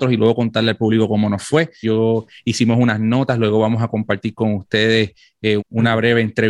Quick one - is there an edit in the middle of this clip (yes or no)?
yes